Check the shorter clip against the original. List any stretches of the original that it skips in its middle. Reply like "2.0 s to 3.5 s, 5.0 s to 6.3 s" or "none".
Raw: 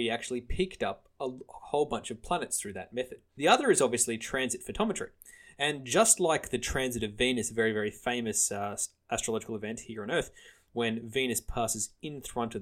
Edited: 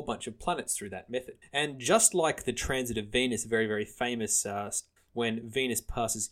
3.3 s to 5.5 s, 9.0 s to 10.6 s